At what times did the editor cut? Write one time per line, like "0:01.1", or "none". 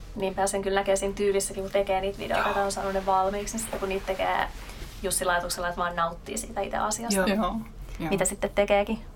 0:07.2